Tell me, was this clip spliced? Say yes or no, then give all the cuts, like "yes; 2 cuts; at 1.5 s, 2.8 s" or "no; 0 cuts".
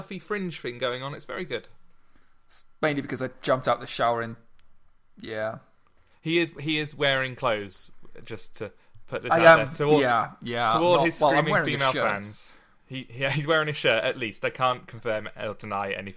no; 0 cuts